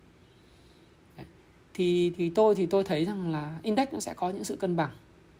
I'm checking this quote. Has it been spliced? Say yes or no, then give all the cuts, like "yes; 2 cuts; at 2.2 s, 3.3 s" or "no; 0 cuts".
no; 0 cuts